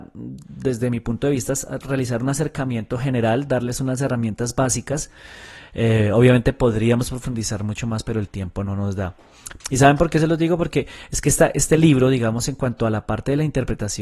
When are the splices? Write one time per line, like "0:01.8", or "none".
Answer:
0:09.6